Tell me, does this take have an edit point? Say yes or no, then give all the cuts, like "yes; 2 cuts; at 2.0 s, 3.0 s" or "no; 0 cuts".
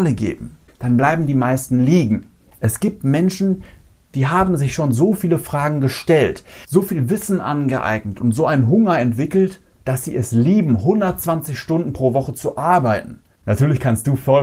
yes; 1 cut; at 13.3 s